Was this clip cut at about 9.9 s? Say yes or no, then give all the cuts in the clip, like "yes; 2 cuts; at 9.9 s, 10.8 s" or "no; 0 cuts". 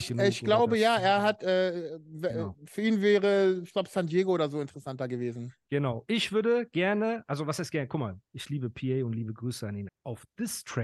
yes; 1 cut; at 9.9 s